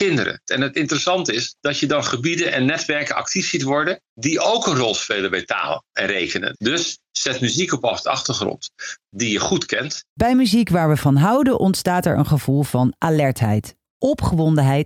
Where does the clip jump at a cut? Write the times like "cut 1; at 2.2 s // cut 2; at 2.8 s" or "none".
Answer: cut 1; at 6.5 s